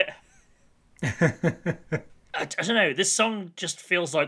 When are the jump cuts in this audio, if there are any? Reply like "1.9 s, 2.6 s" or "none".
none